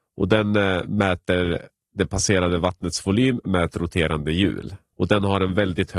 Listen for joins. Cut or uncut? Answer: cut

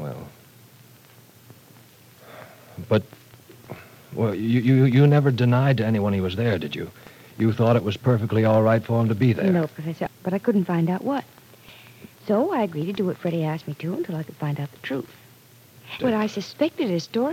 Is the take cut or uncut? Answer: cut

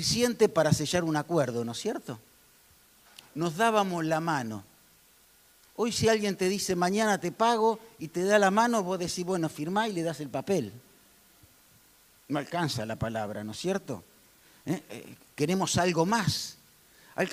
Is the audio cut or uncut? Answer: uncut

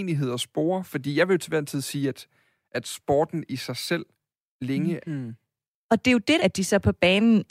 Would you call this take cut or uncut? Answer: cut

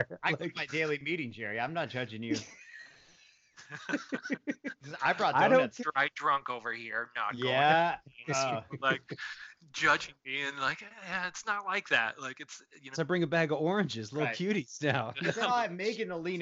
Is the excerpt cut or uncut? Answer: cut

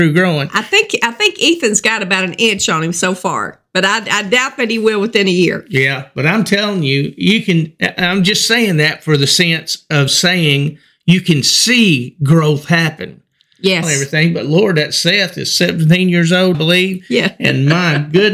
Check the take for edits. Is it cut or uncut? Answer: cut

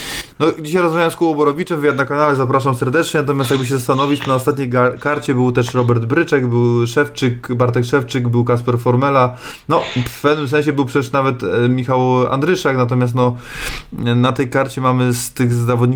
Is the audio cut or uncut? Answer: uncut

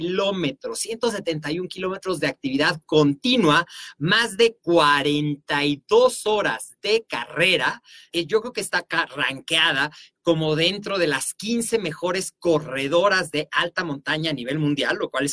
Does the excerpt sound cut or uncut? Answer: cut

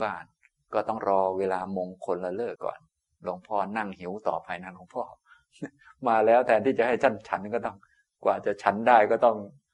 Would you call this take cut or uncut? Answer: cut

